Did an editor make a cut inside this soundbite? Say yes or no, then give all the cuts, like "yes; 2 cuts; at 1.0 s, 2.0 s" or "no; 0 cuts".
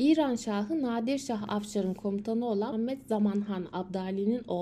yes; 1 cut; at 2.7 s